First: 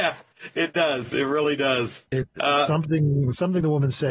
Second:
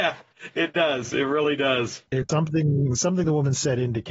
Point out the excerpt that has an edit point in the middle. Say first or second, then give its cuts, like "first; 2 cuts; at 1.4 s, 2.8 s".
second; 1 cut; at 2.3 s